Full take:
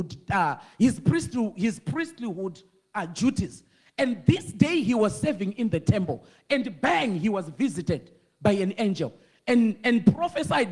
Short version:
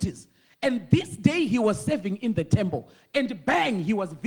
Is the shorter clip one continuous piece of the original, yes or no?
yes